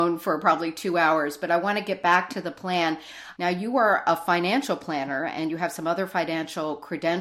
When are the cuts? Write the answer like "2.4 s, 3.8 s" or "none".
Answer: 3.4 s